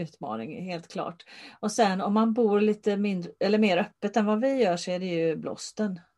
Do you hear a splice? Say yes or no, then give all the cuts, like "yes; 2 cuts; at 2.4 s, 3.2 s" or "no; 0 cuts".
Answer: no; 0 cuts